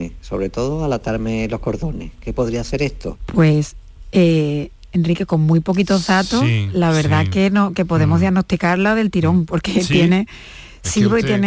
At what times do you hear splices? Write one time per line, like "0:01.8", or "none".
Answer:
0:03.2